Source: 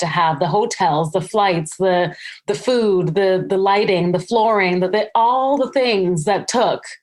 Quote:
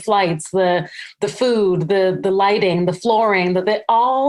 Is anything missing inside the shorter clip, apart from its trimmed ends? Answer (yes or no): no